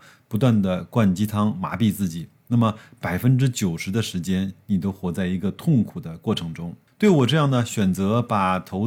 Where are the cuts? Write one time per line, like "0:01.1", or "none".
none